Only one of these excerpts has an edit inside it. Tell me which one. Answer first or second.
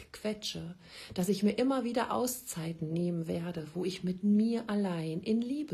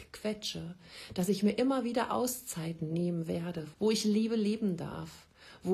second